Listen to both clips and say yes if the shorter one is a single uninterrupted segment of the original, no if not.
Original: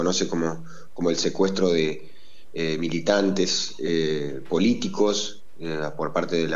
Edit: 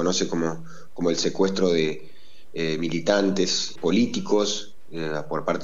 no